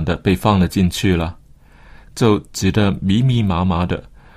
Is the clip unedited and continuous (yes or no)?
no